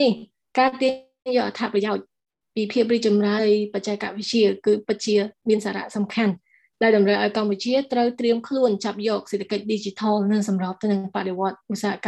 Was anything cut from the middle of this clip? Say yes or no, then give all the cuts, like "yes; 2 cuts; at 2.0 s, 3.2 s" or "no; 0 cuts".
yes; 1 cut; at 3.4 s